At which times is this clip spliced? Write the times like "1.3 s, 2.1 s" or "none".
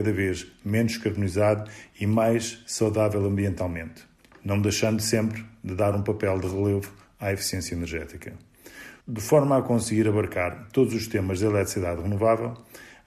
none